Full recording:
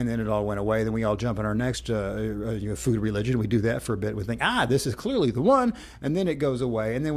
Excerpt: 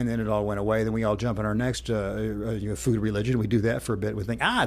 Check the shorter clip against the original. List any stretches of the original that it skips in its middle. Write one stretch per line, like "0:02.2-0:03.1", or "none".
none